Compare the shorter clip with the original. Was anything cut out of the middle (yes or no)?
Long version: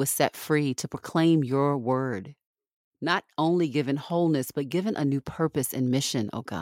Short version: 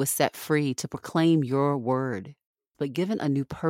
yes